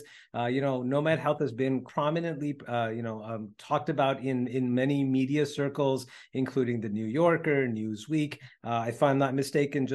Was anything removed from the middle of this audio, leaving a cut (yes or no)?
yes